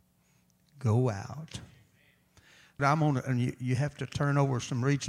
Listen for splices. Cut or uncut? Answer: cut